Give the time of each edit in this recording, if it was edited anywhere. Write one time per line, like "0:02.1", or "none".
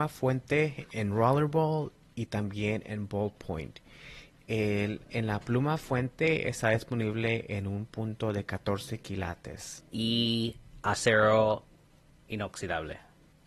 none

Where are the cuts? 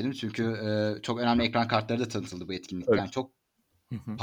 0:03.0

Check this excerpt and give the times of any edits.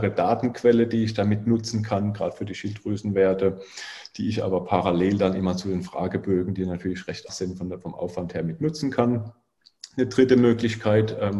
0:07.3

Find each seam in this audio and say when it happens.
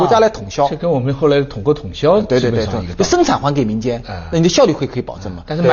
none

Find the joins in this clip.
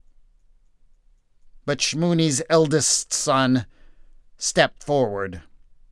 0:04.2

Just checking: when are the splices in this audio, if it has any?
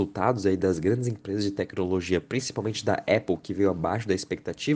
none

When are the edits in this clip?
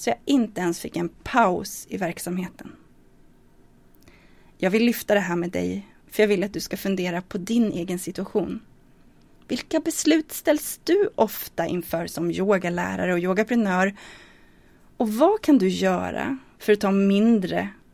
none

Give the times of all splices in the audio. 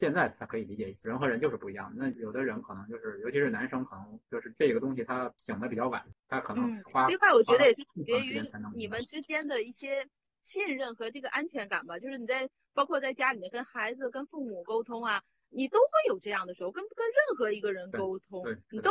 none

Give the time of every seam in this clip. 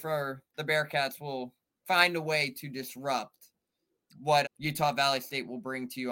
0:04.4

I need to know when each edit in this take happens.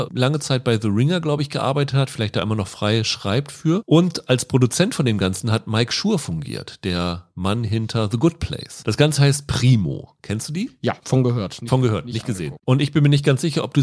0:12.6

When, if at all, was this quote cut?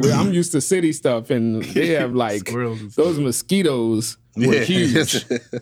none

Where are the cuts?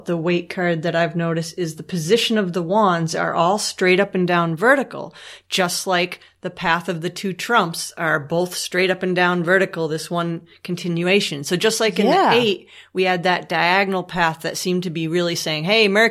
none

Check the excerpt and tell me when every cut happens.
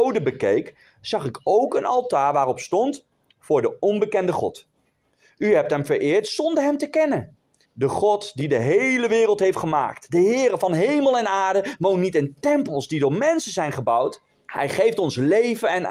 0:07.6
0:14.5

